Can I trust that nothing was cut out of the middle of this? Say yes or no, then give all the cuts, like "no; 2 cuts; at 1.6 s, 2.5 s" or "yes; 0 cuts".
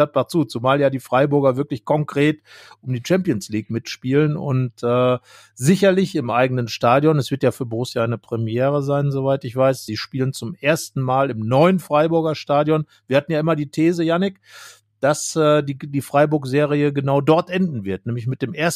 yes; 0 cuts